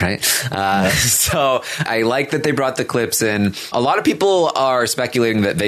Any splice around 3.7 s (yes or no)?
yes